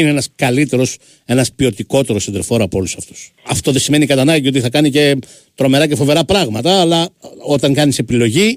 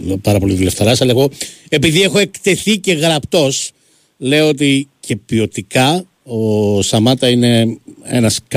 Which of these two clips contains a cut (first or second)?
first